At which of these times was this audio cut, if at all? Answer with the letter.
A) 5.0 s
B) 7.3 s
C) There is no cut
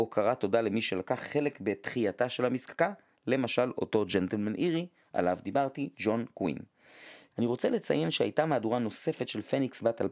B